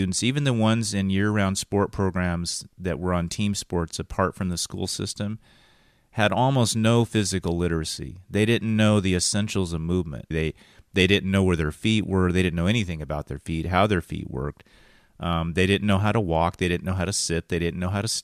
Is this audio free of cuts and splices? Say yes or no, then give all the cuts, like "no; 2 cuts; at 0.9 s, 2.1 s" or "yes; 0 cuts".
no; 1 cut; at 10.3 s